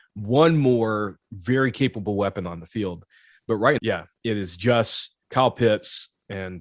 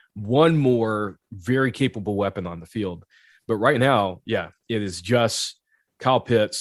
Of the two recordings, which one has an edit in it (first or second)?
first